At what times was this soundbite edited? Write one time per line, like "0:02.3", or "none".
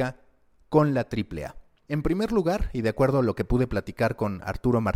0:01.9